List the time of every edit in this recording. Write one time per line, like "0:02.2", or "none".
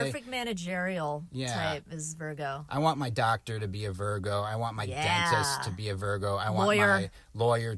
none